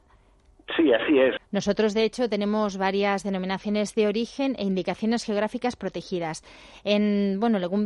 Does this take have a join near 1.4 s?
yes; 1 cut; at 1.4 s

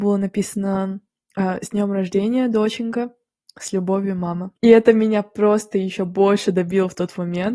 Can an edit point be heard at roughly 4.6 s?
yes; 1 cut; at 4.6 s

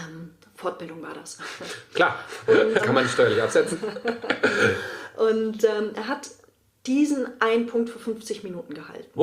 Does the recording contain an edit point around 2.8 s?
yes; 1 cut; at 2.8 s

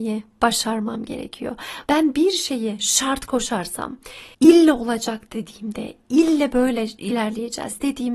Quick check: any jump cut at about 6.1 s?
no; 2 cuts; at 1.9 s, 4.3 s

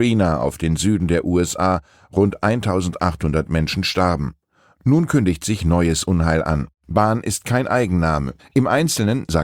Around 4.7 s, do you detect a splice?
no; 2 cuts; at 6.7 s, 8.4 s

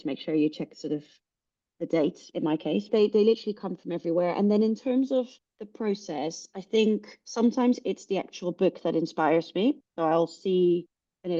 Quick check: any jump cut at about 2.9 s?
yes; 1 cut; at 2.9 s

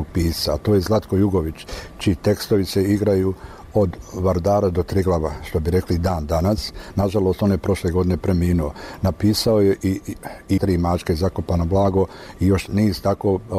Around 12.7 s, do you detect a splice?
yes; 2 cuts; at 10.6 s, 12.7 s

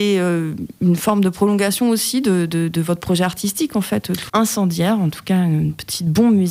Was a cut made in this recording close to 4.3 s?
yes; 1 cut; at 4.3 s

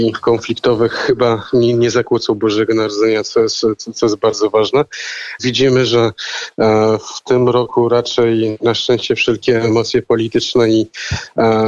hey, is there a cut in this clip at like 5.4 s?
yes; 1 cut; at 5.4 s

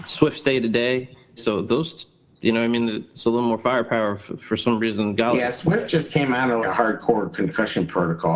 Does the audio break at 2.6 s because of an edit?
no; 2 cuts; at 1.4 s, 6.6 s

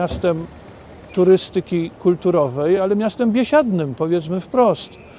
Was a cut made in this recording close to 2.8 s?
no; 0 cuts

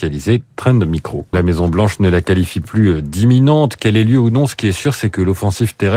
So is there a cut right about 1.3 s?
yes; 1 cut; at 1.3 s

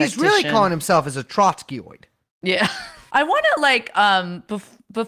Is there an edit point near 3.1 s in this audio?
yes; 1 cut; at 3.1 s

